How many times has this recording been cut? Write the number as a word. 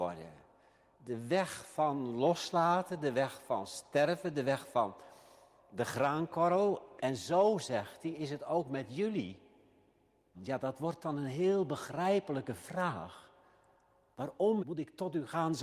three